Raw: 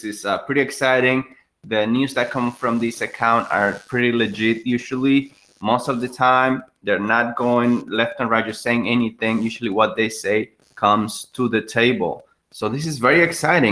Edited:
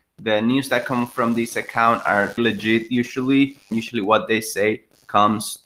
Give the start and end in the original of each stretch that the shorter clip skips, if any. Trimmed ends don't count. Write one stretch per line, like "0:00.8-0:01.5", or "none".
0:03.8-0:04.1
0:05.5-0:09.4